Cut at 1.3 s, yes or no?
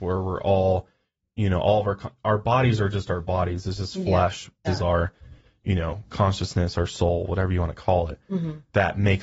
no